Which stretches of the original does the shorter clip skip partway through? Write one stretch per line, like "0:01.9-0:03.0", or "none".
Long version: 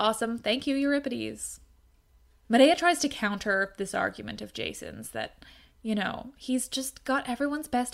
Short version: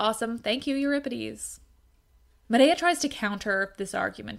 none